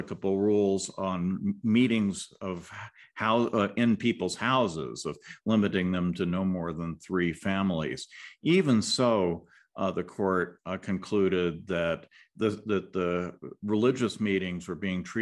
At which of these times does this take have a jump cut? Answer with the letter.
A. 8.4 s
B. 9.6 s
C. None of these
C